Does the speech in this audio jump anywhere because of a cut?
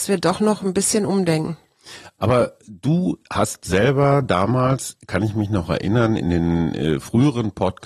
no; 0 cuts

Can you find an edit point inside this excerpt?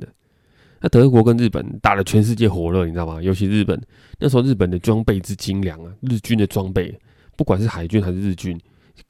no; 0 cuts

